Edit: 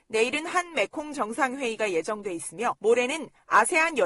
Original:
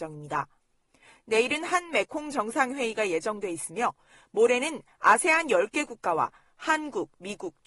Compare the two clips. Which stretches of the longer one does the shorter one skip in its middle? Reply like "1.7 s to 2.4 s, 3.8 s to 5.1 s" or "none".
3.9 s to 4.3 s